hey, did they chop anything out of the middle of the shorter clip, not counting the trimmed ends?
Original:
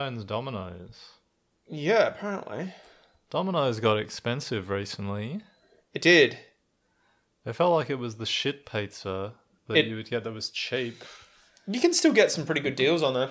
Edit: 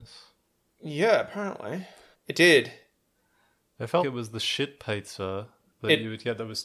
yes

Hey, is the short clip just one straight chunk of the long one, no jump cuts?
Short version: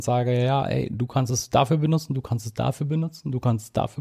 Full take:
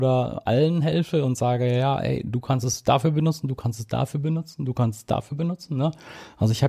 yes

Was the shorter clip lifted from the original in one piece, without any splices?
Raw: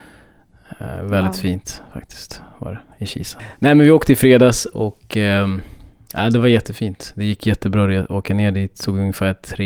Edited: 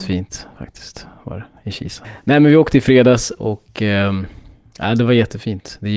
yes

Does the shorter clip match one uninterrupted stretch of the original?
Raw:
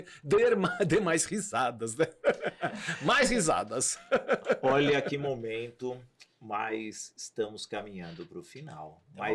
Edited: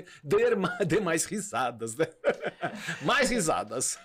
yes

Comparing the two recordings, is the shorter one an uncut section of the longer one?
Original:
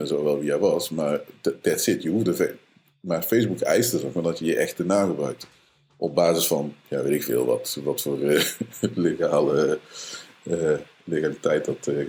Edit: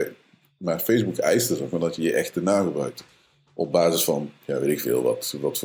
yes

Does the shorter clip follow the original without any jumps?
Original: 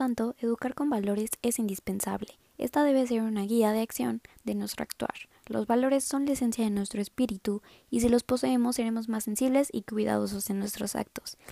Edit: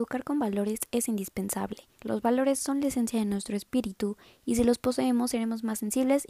no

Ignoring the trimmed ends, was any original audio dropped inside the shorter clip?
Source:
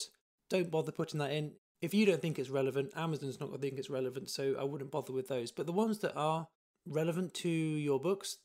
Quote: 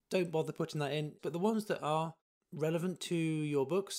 yes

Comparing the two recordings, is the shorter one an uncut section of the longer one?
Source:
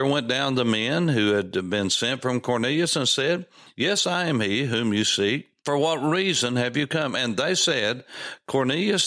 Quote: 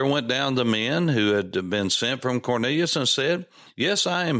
yes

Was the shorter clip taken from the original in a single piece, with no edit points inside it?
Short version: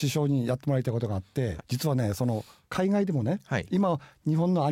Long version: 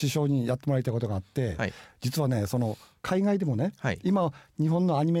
no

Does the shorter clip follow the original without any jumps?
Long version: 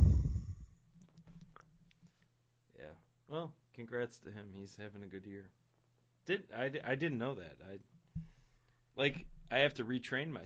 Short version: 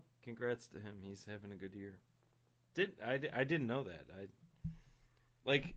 yes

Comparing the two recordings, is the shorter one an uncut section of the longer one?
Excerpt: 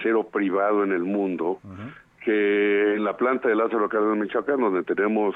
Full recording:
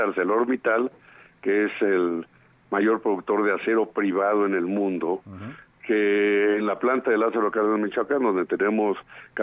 yes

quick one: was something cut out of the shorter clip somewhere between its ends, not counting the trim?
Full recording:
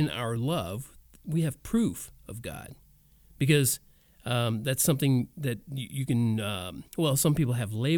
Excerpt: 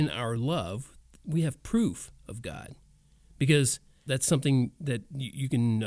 yes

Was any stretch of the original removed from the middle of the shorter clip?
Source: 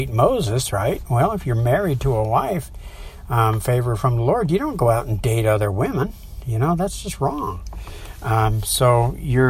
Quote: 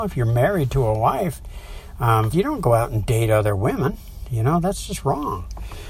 yes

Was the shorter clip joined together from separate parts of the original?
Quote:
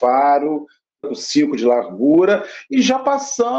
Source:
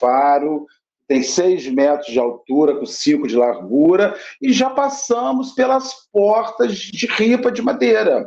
yes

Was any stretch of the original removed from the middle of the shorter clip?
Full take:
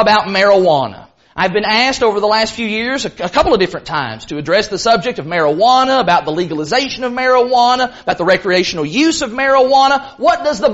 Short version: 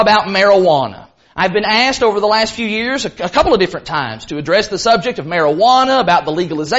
no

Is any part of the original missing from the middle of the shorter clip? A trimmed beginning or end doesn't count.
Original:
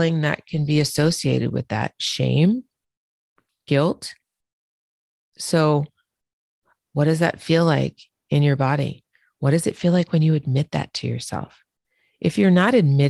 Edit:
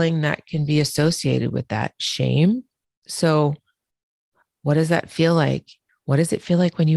yes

